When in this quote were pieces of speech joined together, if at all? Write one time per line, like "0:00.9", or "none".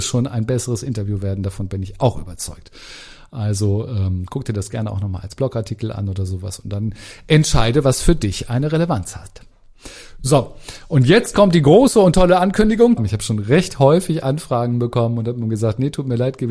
0:13.0

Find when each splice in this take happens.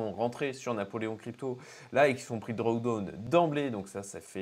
none

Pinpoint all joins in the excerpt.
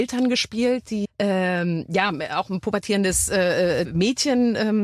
0:01.0
0:03.8

